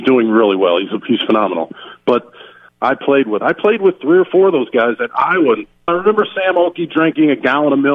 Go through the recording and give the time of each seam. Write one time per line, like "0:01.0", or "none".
0:02.7
0:05.9